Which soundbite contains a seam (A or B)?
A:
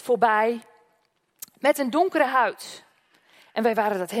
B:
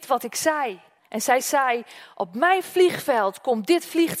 B